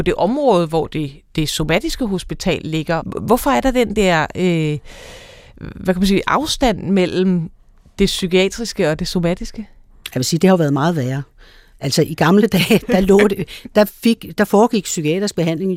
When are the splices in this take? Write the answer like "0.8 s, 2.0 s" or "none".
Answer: 3.0 s